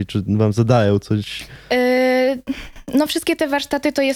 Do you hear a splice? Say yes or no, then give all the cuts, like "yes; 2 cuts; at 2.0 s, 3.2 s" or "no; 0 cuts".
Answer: no; 0 cuts